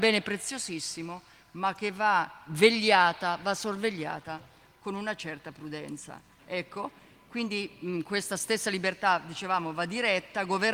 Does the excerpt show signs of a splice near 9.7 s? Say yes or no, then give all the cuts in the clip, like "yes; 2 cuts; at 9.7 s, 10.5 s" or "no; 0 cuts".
no; 1 cut; at 6.4 s